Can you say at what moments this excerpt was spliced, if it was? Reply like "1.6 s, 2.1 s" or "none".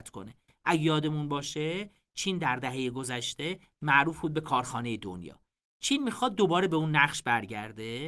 none

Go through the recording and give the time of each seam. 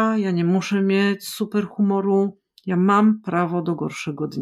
none

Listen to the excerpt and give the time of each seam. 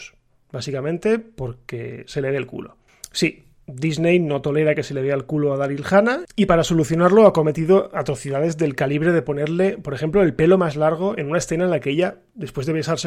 none

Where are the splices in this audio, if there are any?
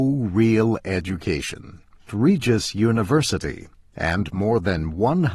2.1 s

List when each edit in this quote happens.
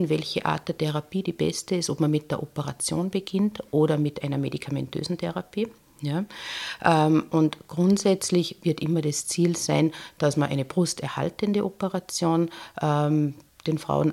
none

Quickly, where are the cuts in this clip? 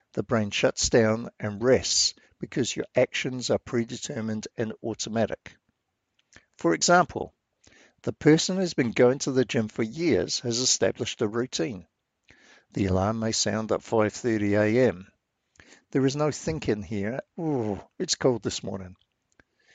17.3 s

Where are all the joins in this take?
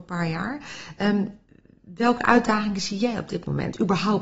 none

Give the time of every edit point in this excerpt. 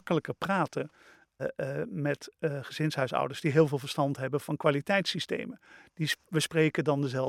1.4 s

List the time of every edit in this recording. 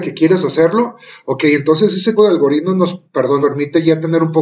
2.2 s, 3.4 s

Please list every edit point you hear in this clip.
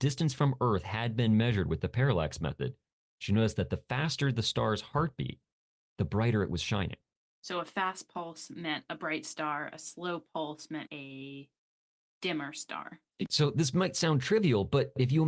10.9 s

